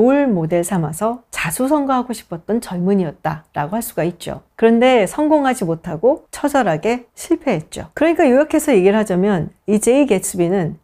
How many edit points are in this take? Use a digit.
1